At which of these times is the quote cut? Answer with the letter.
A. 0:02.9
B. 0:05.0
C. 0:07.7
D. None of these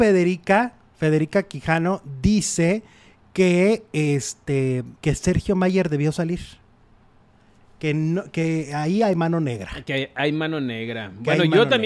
B